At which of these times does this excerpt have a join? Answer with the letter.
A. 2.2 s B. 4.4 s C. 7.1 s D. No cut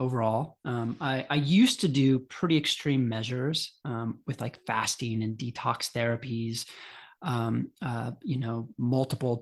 D